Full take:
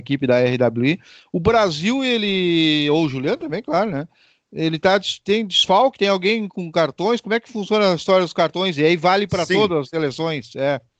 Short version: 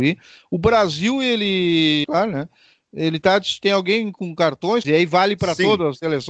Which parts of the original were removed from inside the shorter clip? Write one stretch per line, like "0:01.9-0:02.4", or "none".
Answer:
0:02.9-0:03.6
0:05.2-0:06.0
0:07.2-0:08.8